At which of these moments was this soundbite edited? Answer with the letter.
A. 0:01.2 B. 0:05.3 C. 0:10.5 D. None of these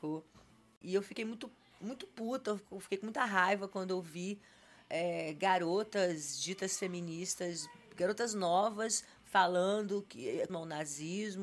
C